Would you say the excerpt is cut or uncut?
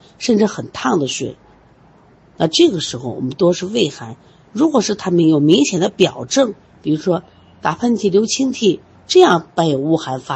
uncut